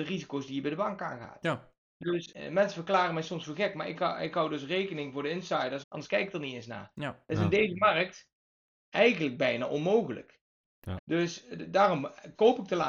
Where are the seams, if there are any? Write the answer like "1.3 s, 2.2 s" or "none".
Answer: 5.8 s, 11.0 s